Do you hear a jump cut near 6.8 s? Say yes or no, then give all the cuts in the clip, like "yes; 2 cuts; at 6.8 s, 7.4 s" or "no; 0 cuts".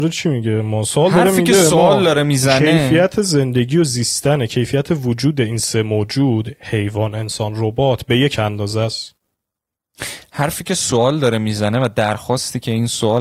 no; 0 cuts